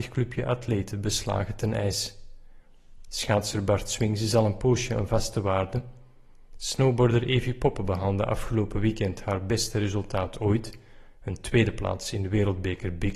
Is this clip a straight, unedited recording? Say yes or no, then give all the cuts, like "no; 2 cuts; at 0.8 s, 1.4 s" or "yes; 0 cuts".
yes; 0 cuts